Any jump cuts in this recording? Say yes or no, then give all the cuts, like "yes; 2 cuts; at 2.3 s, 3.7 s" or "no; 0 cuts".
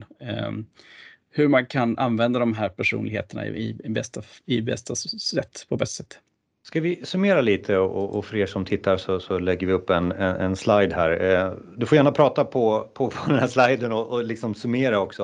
no; 0 cuts